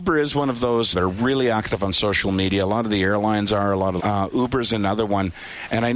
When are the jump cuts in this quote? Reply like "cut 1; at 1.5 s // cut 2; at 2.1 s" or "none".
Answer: cut 1; at 0.9 s // cut 2; at 4.0 s